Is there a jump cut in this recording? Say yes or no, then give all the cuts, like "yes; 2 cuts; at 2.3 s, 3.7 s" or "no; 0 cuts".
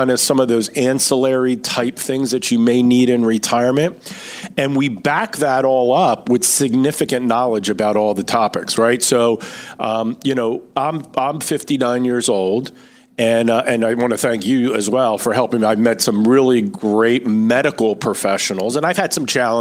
no; 0 cuts